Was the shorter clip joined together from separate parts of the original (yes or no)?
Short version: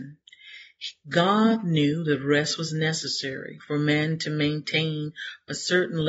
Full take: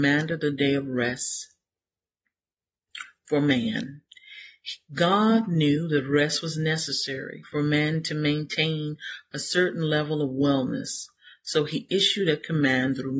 no